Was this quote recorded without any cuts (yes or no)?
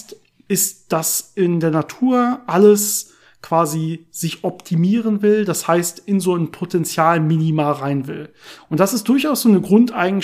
no